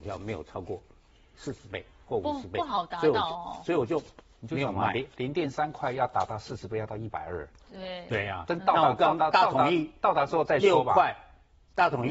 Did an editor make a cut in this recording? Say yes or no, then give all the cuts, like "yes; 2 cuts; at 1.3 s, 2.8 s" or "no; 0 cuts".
no; 0 cuts